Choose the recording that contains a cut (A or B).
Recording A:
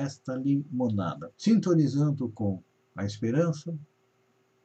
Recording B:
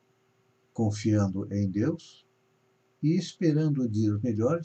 A